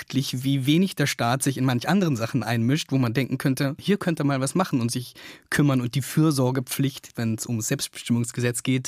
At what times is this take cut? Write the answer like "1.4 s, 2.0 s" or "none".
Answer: 3.8 s, 7.1 s